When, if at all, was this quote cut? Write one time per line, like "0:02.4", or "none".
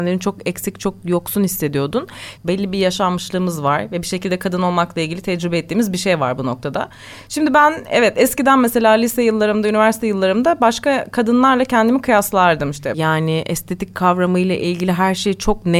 0:02.4
0:12.9